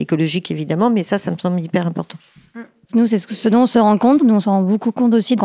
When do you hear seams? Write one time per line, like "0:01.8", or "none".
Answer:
0:02.8
0:04.2